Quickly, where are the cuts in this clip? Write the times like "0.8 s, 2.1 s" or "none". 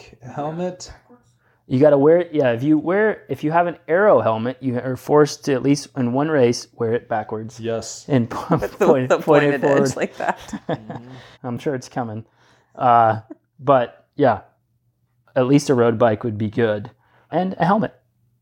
11.3 s, 17.3 s